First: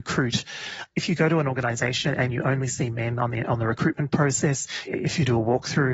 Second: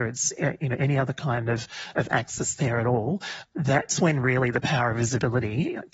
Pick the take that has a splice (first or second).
first